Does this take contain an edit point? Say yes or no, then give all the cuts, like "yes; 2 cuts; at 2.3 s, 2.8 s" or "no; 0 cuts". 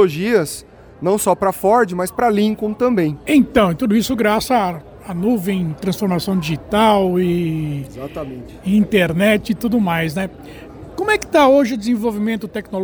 yes; 1 cut; at 3.2 s